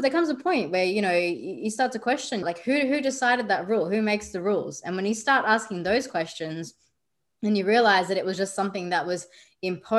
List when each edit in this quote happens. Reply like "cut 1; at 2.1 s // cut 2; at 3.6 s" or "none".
cut 1; at 2.4 s